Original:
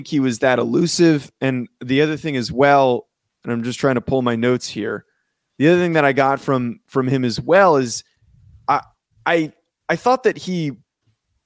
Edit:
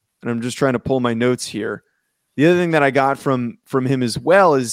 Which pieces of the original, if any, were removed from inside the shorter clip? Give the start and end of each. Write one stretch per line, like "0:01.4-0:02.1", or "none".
none